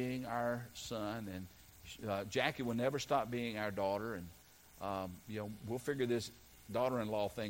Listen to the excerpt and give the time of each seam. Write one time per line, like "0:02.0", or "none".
none